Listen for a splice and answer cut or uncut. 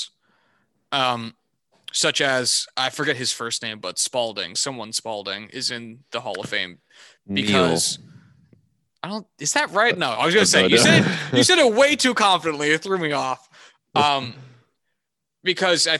uncut